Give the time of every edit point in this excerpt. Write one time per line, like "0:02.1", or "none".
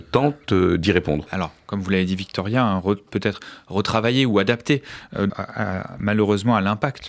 0:01.3
0:05.3

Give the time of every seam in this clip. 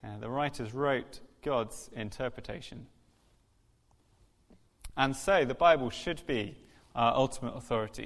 none

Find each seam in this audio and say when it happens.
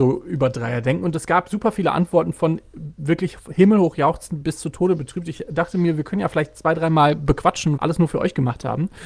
0:07.8

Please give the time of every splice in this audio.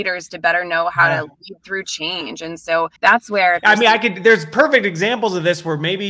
0:03.0

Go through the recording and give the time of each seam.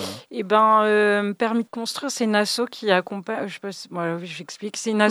0:01.7

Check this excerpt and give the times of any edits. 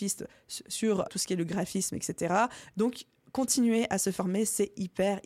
0:01.1
0:02.7

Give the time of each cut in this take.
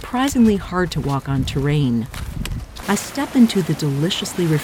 0:02.8

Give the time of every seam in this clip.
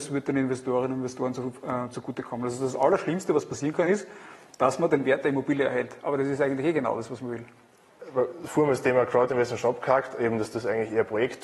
none

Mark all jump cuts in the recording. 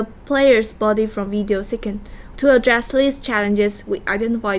0:02.3

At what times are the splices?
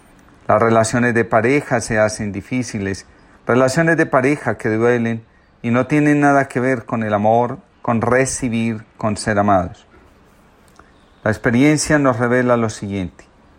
0:03.3
0:07.7

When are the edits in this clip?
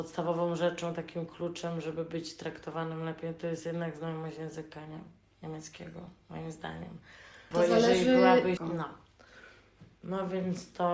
0:07.5
0:08.6

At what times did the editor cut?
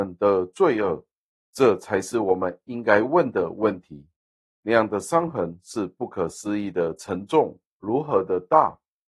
0:01.4
0:04.5

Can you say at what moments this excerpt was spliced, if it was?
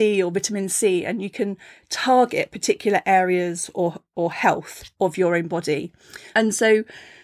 0:06.3

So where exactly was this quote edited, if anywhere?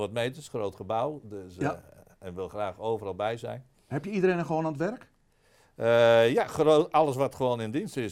none

